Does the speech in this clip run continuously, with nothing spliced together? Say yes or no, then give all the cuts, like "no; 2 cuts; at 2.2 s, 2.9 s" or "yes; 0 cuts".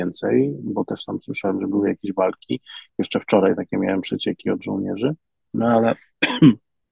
yes; 0 cuts